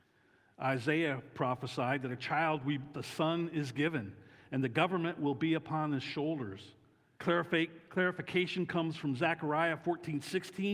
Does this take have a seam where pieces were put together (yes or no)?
yes